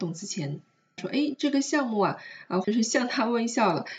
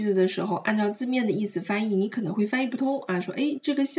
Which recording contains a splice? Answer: first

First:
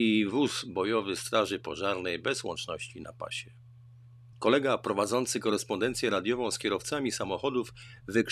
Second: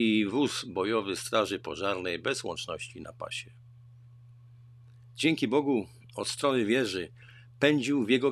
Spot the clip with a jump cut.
first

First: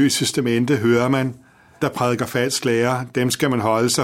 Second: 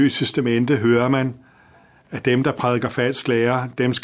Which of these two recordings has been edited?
first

